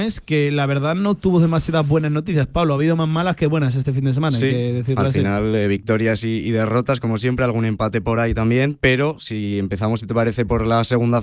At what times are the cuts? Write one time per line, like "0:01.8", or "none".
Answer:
none

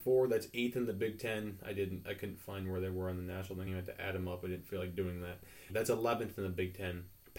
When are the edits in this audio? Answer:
0:03.7
0:05.7

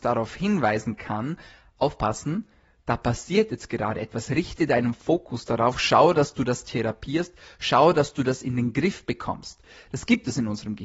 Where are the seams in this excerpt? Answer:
none

